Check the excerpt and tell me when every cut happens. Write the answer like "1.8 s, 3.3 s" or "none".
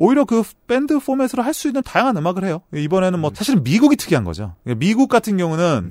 3.3 s